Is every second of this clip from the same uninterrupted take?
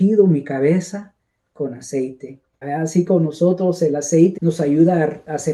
no; 2 cuts; at 2.6 s, 4.4 s

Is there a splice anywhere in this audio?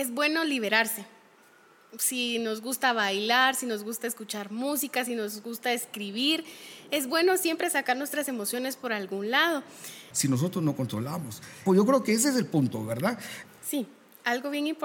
yes; 3 cuts; at 10.1 s, 11.7 s, 13.4 s

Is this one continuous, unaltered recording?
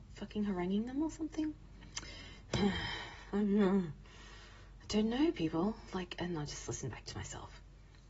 yes; 0 cuts

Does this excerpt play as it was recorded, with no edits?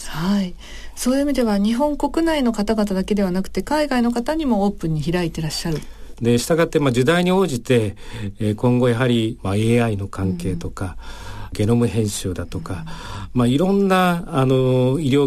no; 1 cut; at 6.1 s

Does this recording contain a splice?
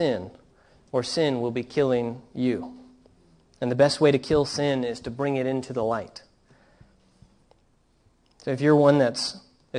no; 0 cuts

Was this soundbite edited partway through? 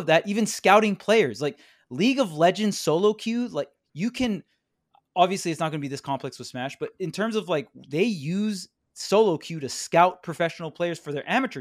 no; 0 cuts

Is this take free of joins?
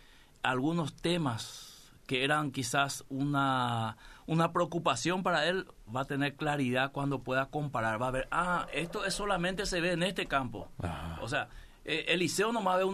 yes; 0 cuts

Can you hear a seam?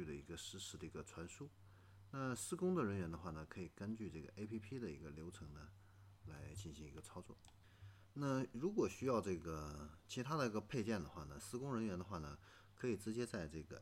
no; 0 cuts

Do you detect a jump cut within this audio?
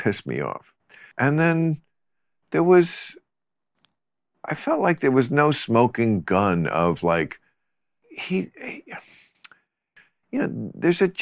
yes; 1 cut; at 8.0 s

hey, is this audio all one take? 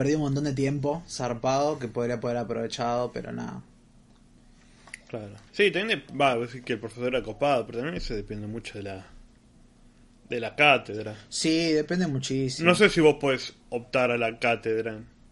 no; 1 cut; at 5.5 s

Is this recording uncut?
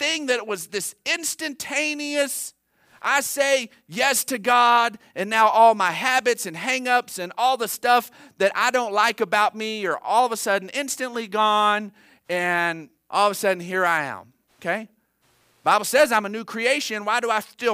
yes; 0 cuts

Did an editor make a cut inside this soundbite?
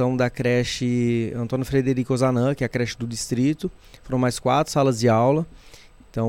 no; 0 cuts

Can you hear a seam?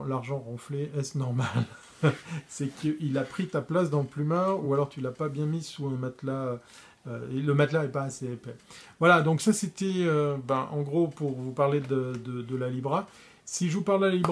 no; 0 cuts

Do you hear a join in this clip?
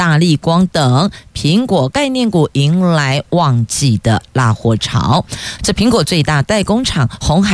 yes; 1 cut; at 5.6 s

